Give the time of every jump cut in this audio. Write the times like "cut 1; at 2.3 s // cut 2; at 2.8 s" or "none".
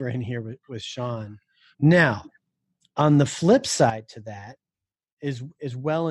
cut 1; at 1.7 s